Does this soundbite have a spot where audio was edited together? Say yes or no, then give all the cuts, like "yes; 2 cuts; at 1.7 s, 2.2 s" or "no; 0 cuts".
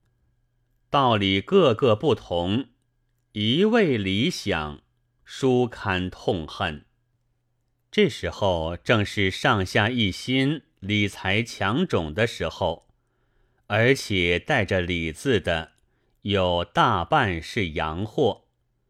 no; 0 cuts